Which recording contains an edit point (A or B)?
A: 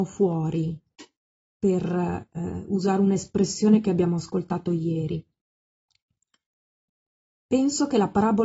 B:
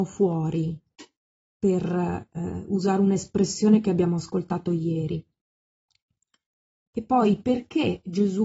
B